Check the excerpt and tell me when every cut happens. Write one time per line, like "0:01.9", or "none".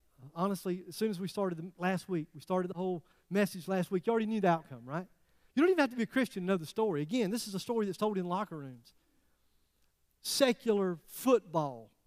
0:01.7